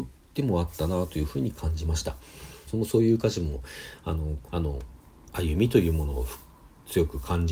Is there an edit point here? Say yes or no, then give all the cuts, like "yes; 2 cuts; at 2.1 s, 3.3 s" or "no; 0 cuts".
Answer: yes; 2 cuts; at 2.7 s, 4.5 s